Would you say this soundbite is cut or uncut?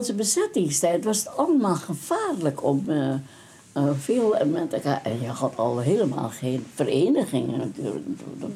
uncut